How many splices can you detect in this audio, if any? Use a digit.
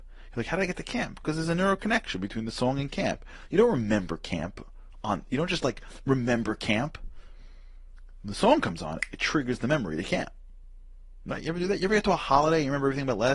0